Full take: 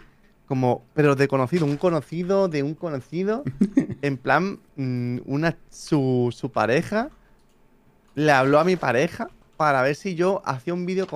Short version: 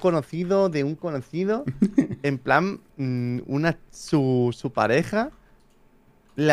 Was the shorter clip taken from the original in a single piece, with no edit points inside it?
yes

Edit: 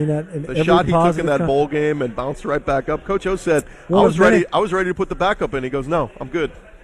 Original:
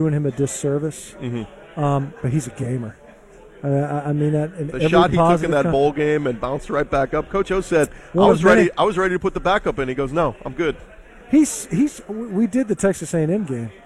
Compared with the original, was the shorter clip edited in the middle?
no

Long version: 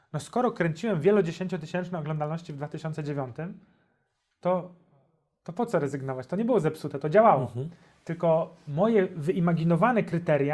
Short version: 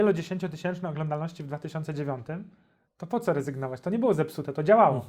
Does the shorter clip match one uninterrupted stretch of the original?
no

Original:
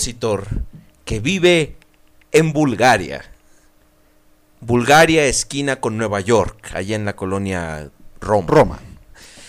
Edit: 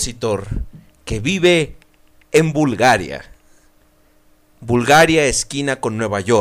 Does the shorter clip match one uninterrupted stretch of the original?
yes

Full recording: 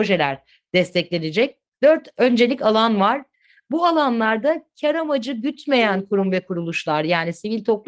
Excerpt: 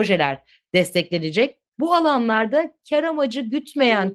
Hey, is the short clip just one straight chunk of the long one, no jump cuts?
no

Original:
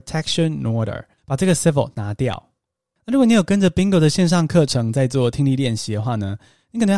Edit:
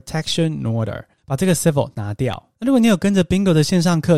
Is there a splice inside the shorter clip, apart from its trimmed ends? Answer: yes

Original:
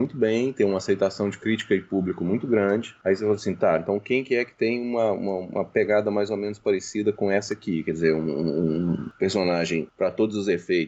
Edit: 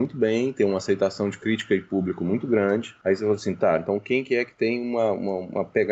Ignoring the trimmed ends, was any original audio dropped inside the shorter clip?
no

